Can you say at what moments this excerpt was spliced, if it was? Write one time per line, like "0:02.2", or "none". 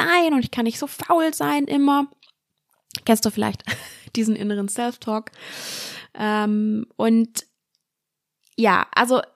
none